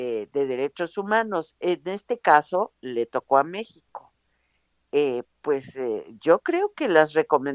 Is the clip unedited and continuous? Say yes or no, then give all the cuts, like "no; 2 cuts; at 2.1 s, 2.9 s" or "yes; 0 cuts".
yes; 0 cuts